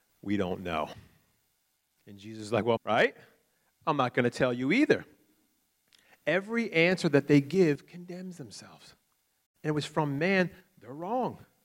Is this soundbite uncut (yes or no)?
no